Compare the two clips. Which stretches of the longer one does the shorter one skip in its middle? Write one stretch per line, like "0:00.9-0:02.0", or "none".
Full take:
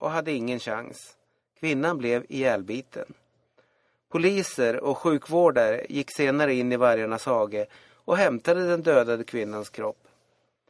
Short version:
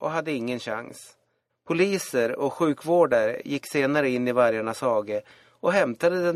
0:01.5-0:03.9